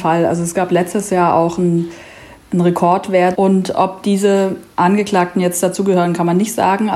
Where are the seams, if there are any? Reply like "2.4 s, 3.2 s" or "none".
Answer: 3.3 s